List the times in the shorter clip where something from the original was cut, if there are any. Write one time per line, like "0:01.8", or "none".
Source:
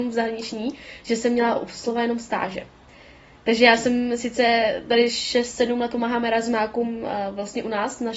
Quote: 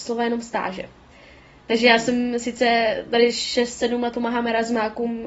none